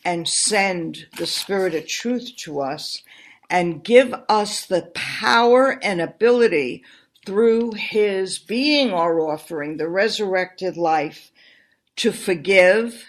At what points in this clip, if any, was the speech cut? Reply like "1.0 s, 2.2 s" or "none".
none